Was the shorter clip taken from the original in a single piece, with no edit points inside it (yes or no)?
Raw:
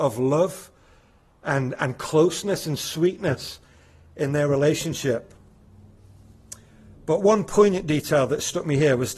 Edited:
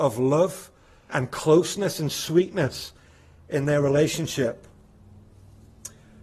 no